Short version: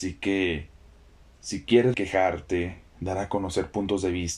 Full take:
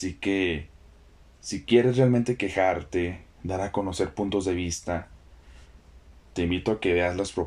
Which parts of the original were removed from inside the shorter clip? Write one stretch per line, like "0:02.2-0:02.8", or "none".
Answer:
0:01.9-0:02.4